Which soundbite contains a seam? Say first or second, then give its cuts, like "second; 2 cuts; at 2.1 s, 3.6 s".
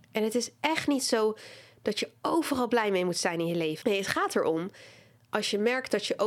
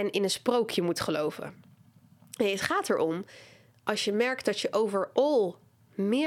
first; 1 cut; at 3.8 s